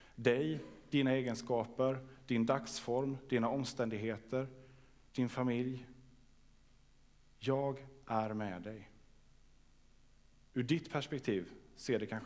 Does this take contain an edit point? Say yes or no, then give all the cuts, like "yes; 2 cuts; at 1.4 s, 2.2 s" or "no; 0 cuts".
yes; 1 cut; at 5.1 s